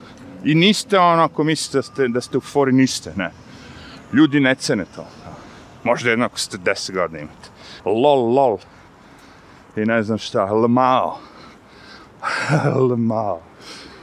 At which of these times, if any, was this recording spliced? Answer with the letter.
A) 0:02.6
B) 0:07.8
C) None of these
B